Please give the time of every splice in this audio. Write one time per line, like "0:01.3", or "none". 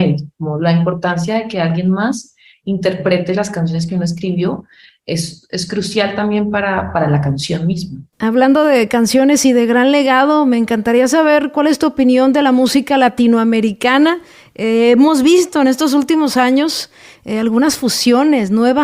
none